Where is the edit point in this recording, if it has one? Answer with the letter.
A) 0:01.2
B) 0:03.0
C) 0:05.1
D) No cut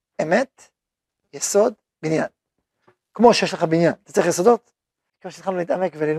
C